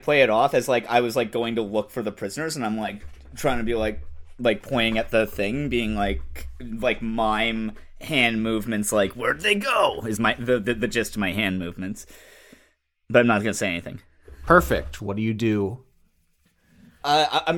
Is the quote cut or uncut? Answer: cut